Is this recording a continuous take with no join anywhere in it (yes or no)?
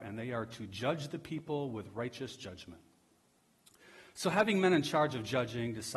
yes